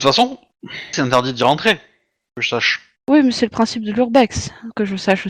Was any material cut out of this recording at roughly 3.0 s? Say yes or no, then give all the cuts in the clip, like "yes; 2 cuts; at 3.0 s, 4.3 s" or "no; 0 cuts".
no; 1 cut; at 0.9 s